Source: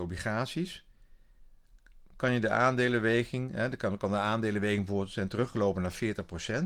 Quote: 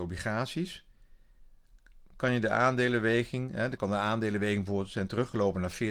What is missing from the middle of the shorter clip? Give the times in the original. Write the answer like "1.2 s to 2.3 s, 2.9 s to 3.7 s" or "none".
3.8 s to 4.0 s